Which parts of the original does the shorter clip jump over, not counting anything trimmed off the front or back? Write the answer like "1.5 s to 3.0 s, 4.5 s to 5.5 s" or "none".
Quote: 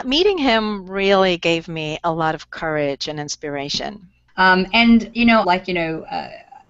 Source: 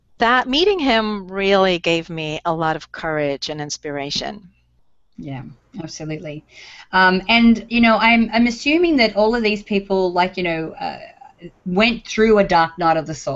4.7 s to 6.8 s, 8.0 s to 10.1 s

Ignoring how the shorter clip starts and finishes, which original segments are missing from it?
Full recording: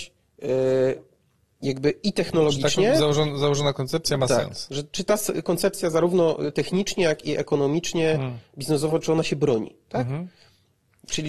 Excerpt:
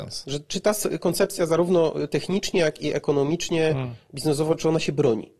none

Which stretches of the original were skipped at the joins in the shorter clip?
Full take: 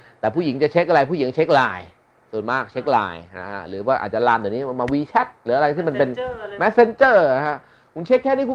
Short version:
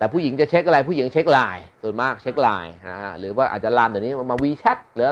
1.9 s to 2.2 s

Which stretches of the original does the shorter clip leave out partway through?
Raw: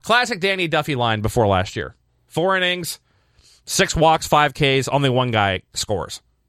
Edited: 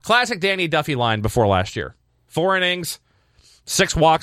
none

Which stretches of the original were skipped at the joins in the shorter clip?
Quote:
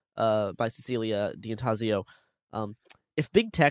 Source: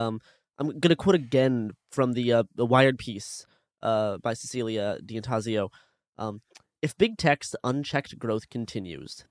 none

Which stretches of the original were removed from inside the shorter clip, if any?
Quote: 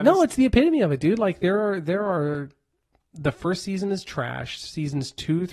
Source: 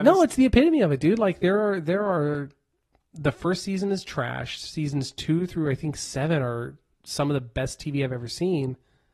none

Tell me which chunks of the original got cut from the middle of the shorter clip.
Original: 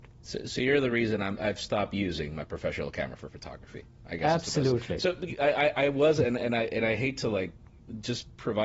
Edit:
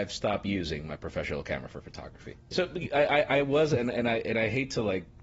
4.0 s to 5.0 s

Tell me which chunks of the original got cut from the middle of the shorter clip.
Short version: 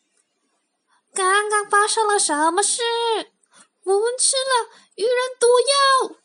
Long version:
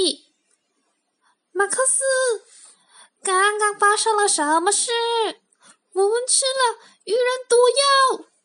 1.4 s to 3.1 s

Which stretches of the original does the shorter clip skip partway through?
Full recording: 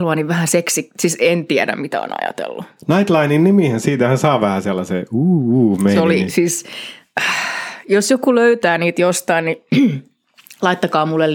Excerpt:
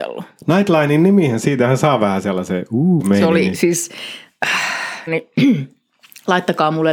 5.4 s to 5.7 s, 7.8 s to 9.4 s

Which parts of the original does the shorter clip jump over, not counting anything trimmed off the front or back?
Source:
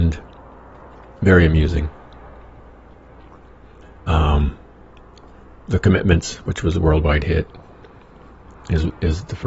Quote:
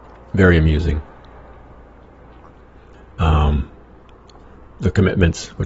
none

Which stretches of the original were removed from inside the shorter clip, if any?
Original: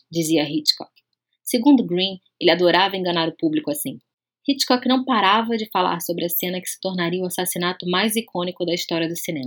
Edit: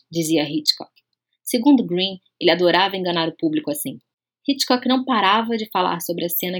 none

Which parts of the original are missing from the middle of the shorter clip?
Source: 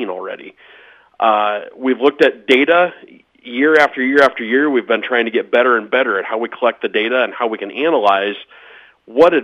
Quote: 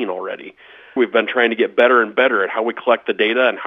1.0 s to 4.7 s

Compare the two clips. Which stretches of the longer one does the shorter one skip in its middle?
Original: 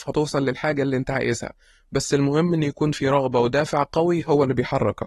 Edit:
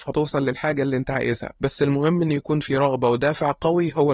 1.6 s to 1.9 s

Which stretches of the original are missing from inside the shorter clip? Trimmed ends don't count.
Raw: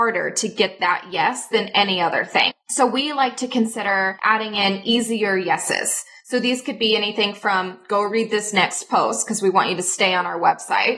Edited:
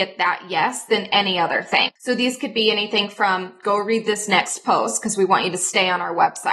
2.6 s to 6.2 s

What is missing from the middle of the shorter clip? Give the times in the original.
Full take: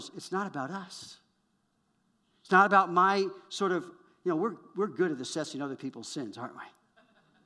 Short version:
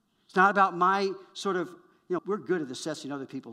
4.3 s to 4.7 s

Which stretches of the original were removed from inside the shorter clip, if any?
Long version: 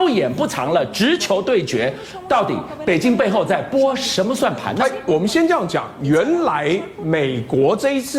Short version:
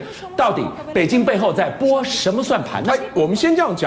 none

